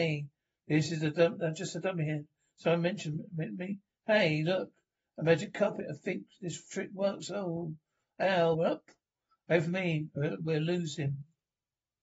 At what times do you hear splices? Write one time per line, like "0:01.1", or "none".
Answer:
0:08.5